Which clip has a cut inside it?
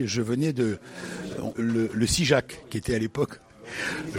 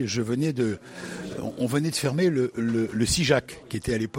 first; 1 cut; at 1.5 s

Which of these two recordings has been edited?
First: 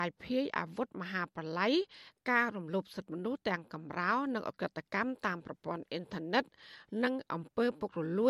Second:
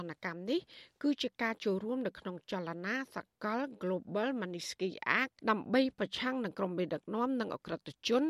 second; 1 cut; at 5.4 s

